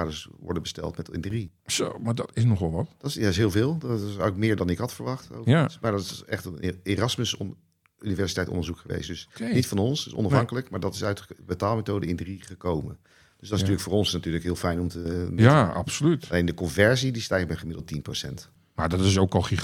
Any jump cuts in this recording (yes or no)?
no